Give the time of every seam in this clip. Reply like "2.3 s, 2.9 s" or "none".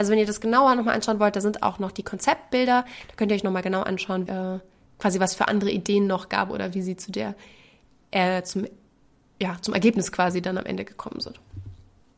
4.3 s